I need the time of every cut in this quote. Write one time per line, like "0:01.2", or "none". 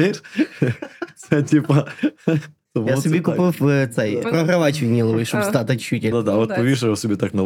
0:06.1